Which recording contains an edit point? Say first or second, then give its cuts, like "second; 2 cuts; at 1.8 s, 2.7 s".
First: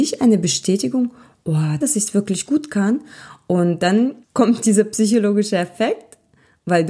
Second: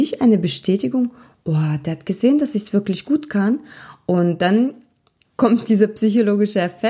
first; 2 cuts; at 1.8 s, 4.2 s